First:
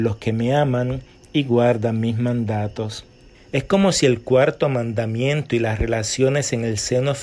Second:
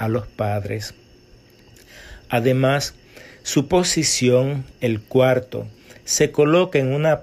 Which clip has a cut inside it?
first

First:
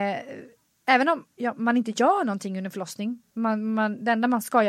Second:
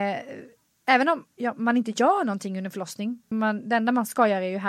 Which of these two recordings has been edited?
second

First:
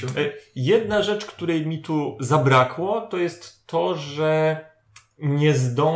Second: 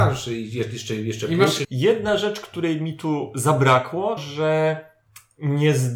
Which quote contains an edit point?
second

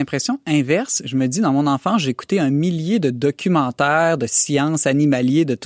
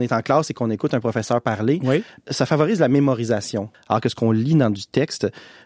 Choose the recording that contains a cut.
second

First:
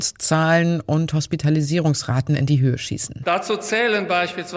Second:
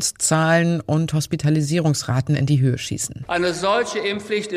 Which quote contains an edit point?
second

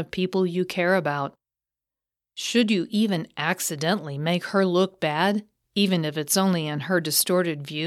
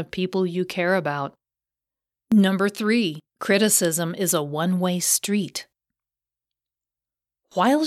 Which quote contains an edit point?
second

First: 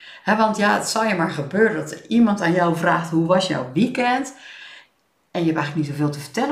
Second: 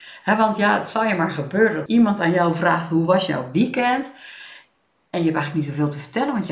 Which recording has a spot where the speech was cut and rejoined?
second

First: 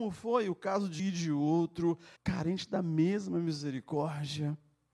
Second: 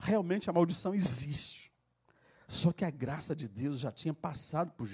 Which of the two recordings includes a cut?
first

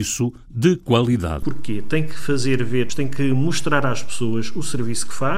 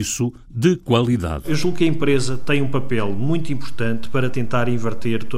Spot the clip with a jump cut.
first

